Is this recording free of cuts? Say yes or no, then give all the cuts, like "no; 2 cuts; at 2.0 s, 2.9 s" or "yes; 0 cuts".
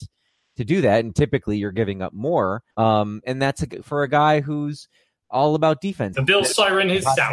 no; 2 cuts; at 2.7 s, 6.1 s